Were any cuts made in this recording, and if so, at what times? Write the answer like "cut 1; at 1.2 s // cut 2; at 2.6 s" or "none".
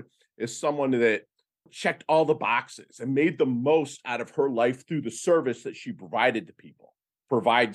cut 1; at 1.7 s